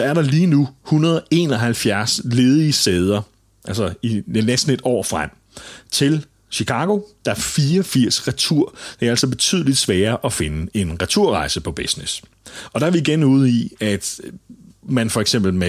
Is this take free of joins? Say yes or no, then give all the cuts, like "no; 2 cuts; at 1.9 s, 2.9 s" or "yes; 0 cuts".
yes; 0 cuts